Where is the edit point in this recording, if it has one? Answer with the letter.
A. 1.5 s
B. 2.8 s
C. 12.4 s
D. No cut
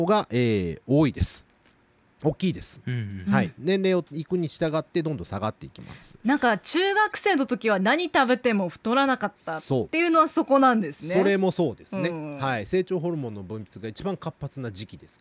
D